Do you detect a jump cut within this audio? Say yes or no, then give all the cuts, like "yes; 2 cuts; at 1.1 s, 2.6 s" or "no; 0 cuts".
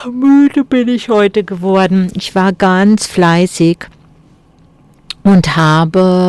no; 0 cuts